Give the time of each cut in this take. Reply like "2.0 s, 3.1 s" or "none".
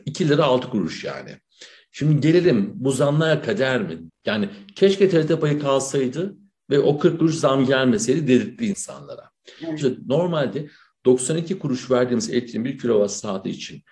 4.1 s, 9.8 s